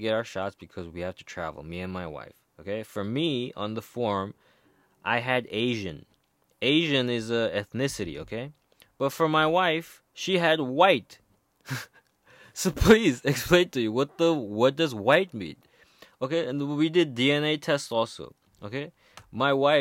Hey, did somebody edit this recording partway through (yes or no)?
yes